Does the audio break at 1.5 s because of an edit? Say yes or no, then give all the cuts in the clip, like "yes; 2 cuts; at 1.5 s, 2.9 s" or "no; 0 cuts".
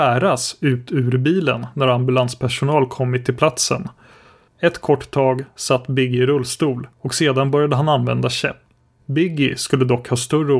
no; 3 cuts; at 4.5 s, 6.9 s, 9.0 s